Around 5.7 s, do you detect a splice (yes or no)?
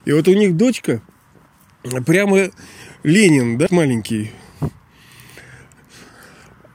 yes